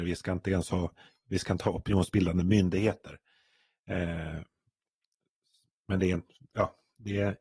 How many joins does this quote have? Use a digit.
0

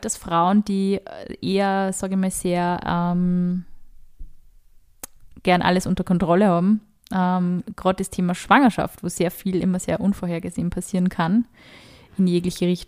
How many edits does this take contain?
0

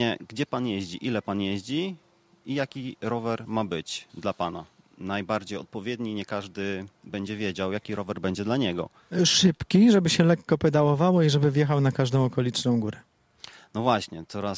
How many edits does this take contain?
0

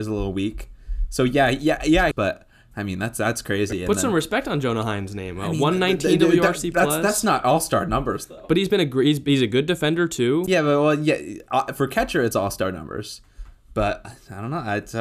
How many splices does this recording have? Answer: 1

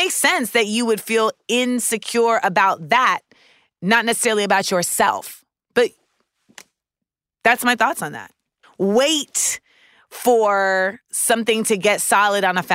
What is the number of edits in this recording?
1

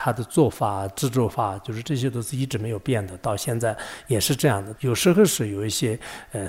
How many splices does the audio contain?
1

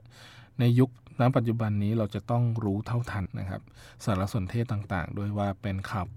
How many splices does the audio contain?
1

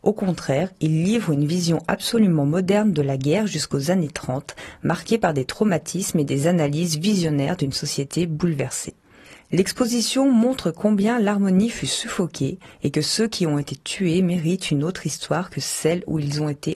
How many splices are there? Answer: 0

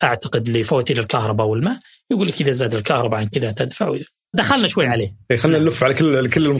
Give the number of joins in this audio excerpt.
1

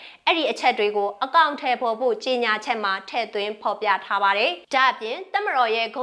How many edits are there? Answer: 1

